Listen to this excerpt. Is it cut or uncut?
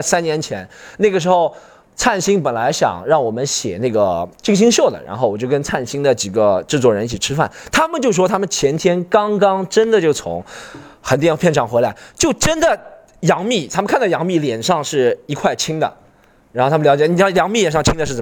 uncut